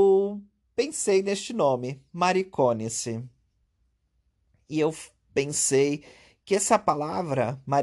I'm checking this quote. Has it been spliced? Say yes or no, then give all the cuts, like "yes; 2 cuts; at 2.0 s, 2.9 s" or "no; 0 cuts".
no; 0 cuts